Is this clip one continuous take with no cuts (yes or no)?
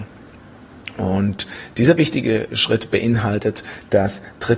yes